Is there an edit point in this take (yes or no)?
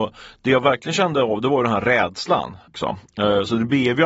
yes